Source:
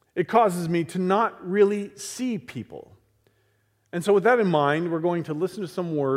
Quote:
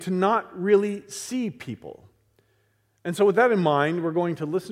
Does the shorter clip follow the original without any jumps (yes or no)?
yes